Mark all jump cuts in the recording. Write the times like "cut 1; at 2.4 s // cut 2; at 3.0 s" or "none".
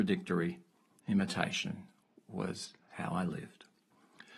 cut 1; at 0.9 s

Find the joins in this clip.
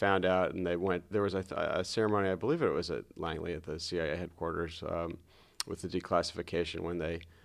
cut 1; at 1.1 s

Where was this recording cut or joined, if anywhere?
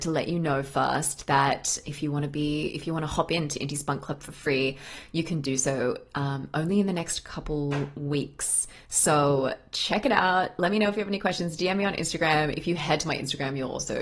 none

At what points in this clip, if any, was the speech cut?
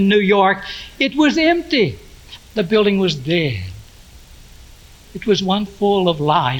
cut 1; at 2.4 s // cut 2; at 5.7 s

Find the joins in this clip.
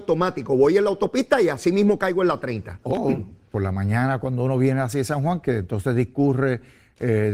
cut 1; at 2.8 s

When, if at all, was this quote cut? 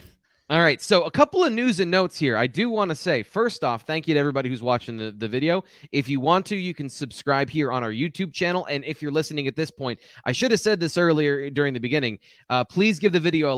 none

